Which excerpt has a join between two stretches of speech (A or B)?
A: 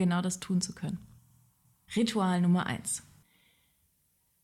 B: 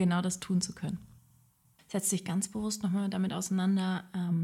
B